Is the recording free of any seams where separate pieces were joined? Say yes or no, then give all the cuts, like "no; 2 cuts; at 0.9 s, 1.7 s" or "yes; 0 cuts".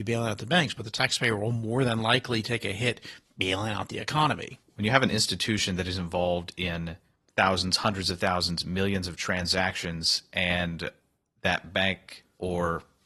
yes; 0 cuts